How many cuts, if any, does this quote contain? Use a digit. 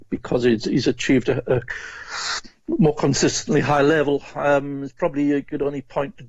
0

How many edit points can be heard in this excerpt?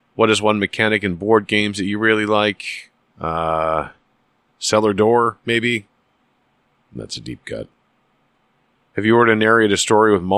1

